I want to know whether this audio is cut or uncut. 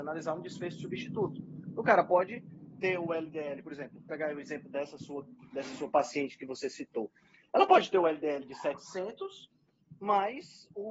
uncut